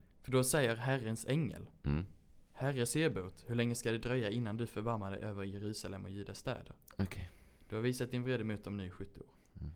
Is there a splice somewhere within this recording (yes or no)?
yes